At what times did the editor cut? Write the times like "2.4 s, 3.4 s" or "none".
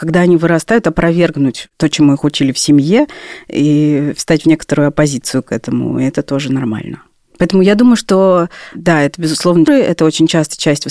9.7 s